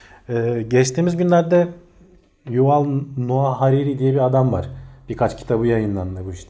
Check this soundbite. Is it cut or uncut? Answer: uncut